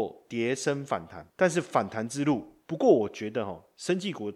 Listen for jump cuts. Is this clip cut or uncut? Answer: cut